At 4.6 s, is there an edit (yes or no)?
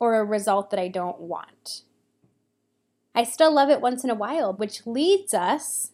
yes